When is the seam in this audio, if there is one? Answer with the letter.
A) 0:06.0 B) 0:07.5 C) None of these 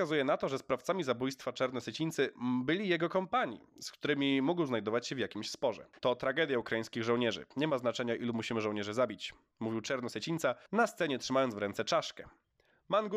A